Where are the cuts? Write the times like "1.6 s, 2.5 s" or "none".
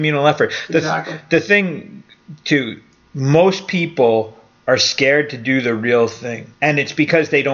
6.5 s